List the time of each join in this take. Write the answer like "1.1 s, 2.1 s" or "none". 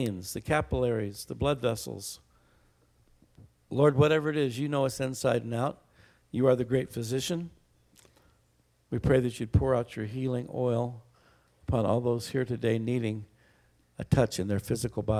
none